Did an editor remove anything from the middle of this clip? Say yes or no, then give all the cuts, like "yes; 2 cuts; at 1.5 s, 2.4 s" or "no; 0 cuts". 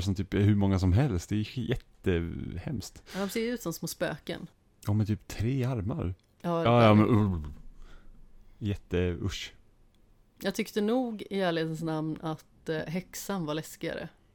yes; 1 cut; at 6.7 s